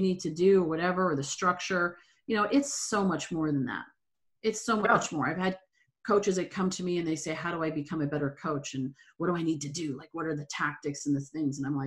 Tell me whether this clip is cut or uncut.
uncut